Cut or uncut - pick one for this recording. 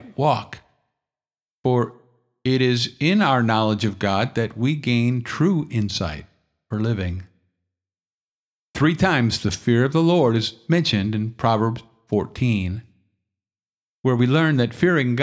cut